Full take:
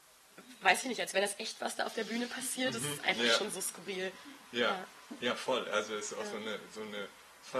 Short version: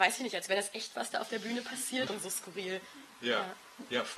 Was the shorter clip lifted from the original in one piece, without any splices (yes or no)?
no